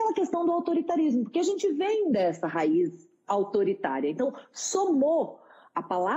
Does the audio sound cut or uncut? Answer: uncut